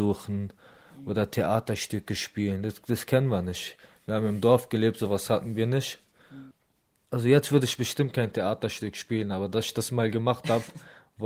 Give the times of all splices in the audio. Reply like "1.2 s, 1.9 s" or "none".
none